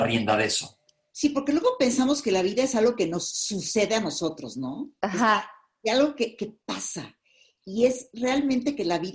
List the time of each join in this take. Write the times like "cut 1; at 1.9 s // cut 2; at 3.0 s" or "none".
none